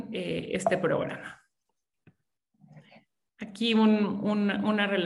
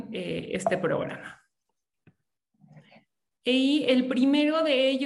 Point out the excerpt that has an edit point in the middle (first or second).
second